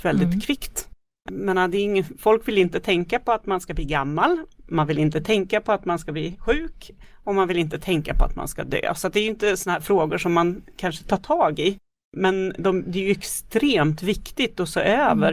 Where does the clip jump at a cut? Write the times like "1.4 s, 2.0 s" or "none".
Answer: 1.3 s